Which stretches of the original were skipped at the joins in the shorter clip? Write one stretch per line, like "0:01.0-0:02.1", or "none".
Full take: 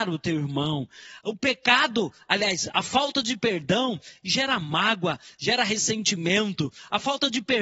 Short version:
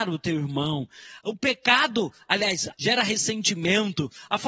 0:02.7-0:05.3